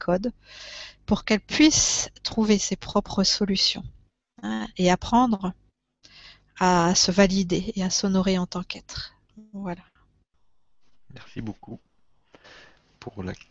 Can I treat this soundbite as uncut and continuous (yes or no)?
yes